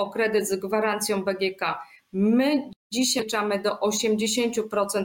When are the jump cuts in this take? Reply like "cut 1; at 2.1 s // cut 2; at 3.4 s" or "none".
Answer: cut 1; at 2.8 s